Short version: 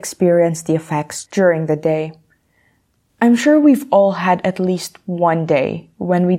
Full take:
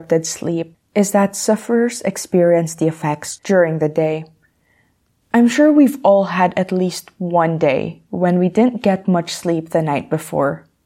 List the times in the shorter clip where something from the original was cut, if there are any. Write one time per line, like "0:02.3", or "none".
none